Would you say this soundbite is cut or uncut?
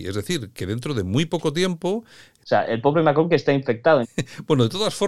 cut